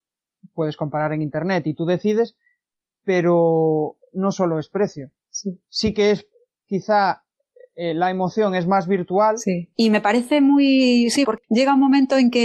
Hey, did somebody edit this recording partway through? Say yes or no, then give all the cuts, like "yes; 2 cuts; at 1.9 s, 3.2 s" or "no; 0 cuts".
yes; 2 cuts; at 9.7 s, 11.2 s